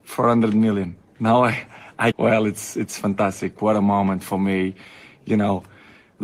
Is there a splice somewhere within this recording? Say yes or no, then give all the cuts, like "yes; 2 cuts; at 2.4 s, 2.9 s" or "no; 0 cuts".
yes; 2 cuts; at 1.1 s, 2.1 s